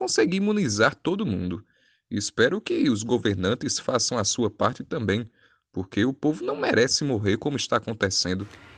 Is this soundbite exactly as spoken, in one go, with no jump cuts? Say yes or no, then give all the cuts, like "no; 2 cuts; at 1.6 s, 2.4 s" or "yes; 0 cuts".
yes; 0 cuts